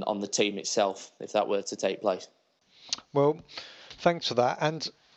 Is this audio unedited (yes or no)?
yes